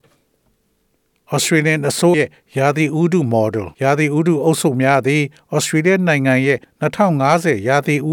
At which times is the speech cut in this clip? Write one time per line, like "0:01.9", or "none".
0:02.1
0:03.7